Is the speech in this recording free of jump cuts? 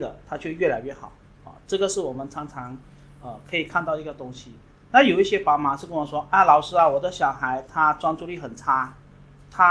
no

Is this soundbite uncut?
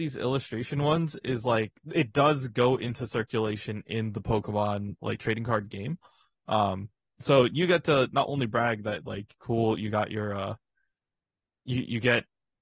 yes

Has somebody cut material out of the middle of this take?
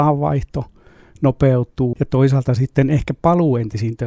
yes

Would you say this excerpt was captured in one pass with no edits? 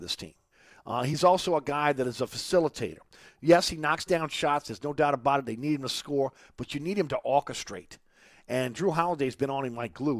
yes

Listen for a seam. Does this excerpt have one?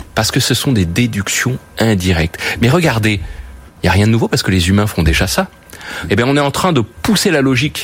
yes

